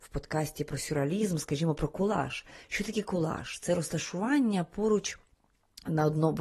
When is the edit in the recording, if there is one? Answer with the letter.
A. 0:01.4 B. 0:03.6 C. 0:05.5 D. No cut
D